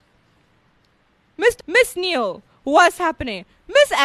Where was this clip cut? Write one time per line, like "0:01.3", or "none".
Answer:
0:01.6

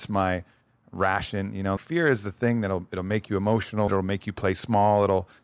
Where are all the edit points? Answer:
0:01.8
0:03.9

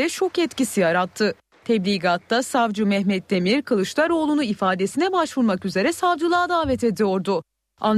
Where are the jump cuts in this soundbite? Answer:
none

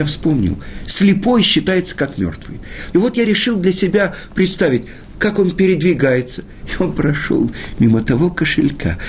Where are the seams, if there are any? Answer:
0:02.9
0:05.1
0:06.6

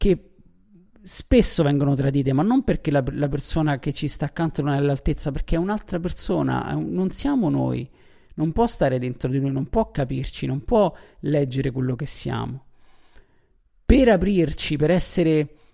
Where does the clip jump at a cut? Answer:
none

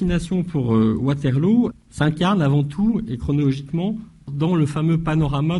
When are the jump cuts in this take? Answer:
0:01.7
0:04.3

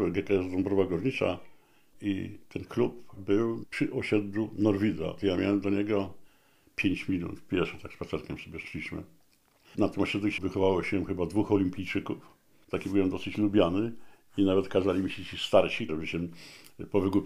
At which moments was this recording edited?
0:10.4
0:12.6
0:15.9

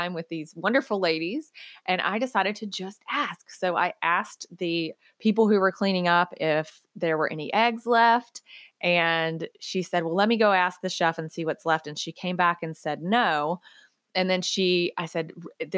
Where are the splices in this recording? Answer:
none

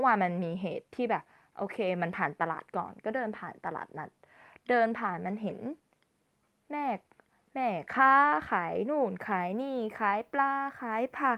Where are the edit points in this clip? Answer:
none

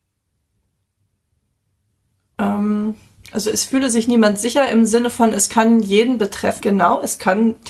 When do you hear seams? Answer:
0:06.6

